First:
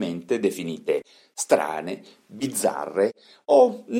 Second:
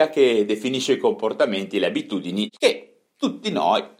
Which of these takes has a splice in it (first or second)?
second